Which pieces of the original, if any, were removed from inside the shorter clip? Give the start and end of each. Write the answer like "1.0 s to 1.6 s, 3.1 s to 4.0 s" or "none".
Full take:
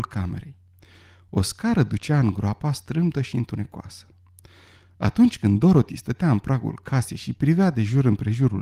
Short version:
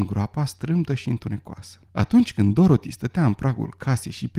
4.1 s to 4.9 s